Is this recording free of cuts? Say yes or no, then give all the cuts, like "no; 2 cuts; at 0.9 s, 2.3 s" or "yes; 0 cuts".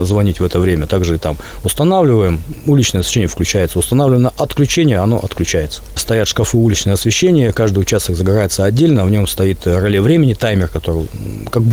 no; 1 cut; at 6.0 s